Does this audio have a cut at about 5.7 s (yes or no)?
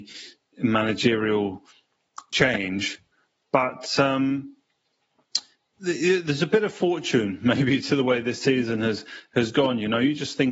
no